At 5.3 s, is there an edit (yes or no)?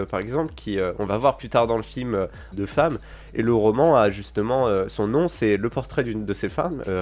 no